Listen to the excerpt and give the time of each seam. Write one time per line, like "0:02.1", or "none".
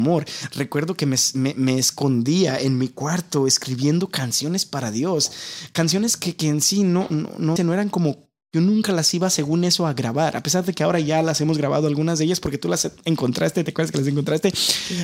0:07.6